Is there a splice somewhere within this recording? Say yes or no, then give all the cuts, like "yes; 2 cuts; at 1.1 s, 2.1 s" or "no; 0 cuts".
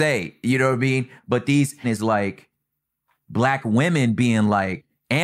yes; 1 cut; at 1.8 s